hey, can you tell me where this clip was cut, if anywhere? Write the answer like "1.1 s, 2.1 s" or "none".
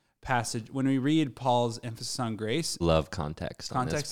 2.8 s